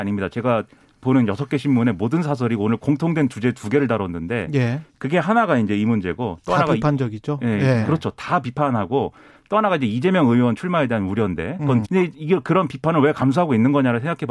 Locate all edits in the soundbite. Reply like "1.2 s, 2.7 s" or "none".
11.8 s